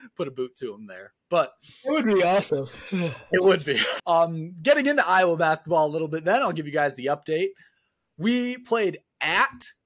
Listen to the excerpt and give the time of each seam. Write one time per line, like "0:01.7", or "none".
0:04.0